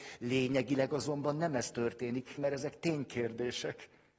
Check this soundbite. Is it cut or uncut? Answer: cut